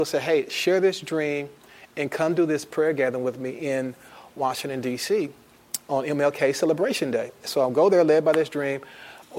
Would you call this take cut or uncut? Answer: uncut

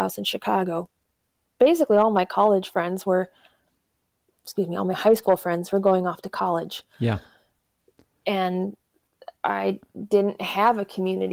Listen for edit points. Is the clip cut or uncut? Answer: uncut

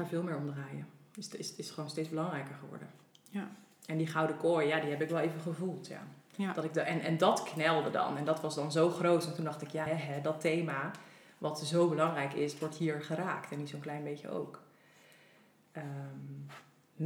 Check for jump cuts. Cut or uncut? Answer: cut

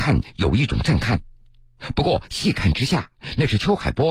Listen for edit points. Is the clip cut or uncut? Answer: uncut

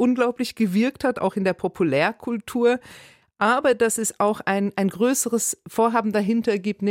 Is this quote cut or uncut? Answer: uncut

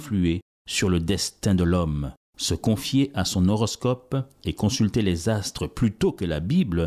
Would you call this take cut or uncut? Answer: uncut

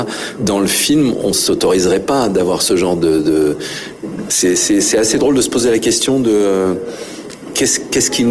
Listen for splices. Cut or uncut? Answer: cut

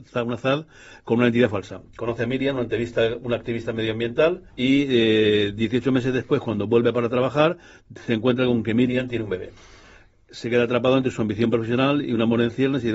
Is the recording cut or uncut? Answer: cut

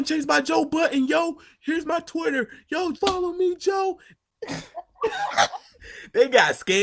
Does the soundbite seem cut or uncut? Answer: cut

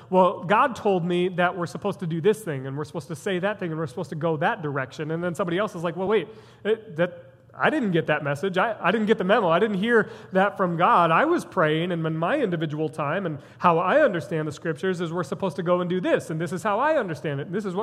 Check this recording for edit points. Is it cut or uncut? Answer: uncut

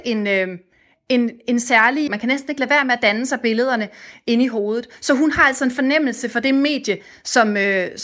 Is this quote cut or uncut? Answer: cut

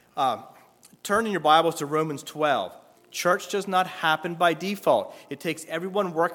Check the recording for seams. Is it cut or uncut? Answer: cut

